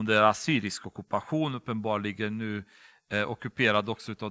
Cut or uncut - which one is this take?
uncut